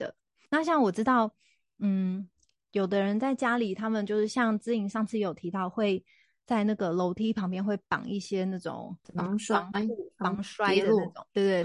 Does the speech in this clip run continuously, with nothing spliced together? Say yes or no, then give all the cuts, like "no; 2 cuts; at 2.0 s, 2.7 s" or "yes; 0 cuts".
yes; 0 cuts